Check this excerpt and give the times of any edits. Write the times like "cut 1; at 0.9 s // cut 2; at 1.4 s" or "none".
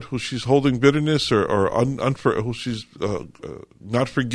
none